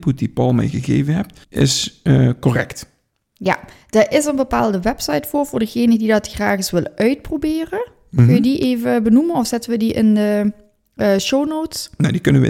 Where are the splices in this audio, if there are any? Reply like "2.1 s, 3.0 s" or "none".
1.4 s

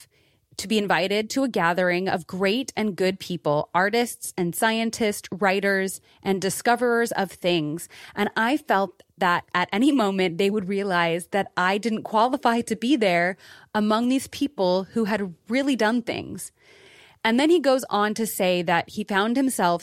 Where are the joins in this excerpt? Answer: none

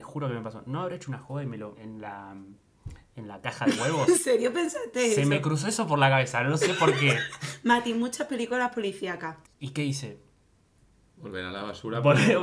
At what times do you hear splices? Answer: 1.7 s, 9.4 s

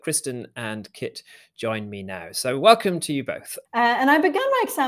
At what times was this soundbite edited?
3.6 s

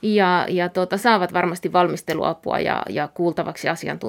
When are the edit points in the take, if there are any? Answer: none

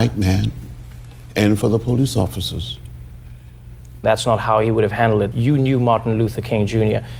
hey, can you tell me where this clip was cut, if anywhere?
4.0 s, 5.3 s

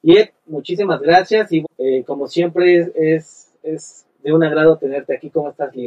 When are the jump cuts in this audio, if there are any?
1.6 s

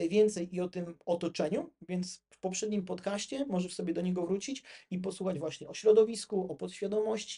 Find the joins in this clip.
none

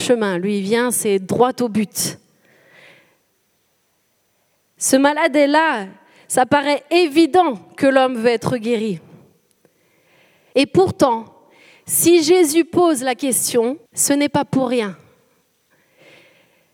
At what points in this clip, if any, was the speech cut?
10.5 s, 13.9 s

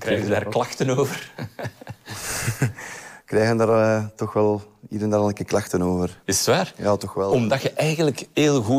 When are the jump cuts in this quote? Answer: none

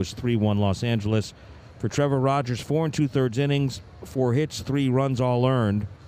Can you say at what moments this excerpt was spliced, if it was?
none

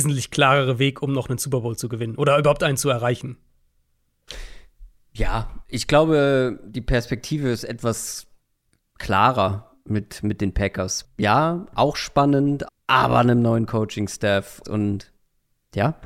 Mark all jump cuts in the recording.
11.0 s, 12.7 s, 14.6 s

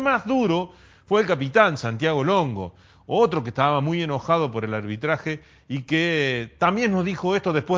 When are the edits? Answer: none

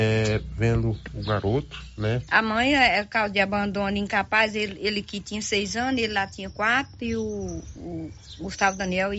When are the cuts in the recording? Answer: 2.3 s

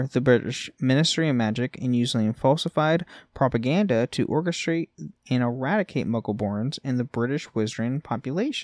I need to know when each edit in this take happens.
none

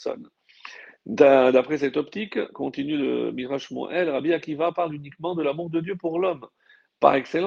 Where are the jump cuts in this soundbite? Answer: none

